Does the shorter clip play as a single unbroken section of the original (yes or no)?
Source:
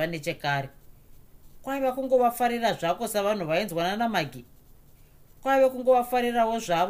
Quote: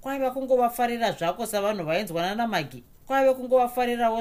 no